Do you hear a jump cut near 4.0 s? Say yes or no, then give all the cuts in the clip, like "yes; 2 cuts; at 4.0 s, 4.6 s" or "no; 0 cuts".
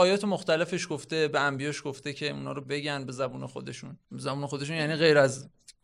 yes; 1 cut; at 4.0 s